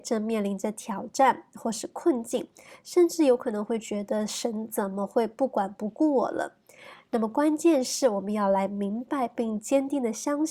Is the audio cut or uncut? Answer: uncut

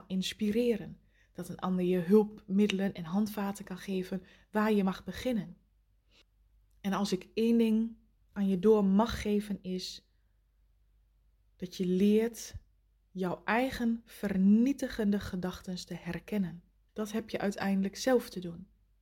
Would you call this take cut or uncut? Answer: cut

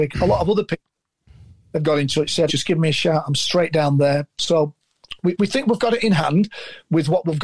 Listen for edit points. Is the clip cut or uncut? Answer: cut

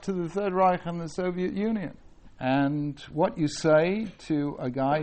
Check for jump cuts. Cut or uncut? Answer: cut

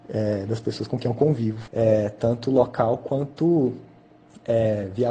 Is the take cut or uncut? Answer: cut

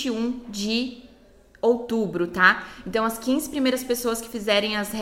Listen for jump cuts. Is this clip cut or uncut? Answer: uncut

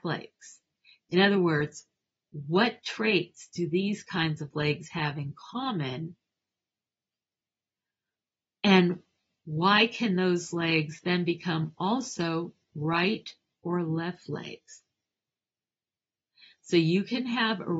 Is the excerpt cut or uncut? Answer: uncut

